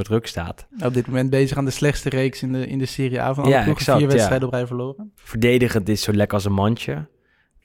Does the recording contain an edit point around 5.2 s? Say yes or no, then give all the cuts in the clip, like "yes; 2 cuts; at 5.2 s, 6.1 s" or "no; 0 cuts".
yes; 1 cut; at 5.2 s